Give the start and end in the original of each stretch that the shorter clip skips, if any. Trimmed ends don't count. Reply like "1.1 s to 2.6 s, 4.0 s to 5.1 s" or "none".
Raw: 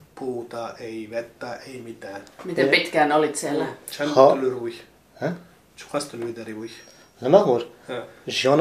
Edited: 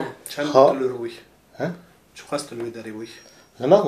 none